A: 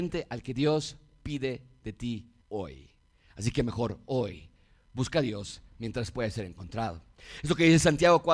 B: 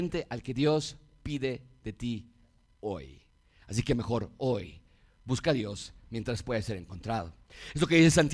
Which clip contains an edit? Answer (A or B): A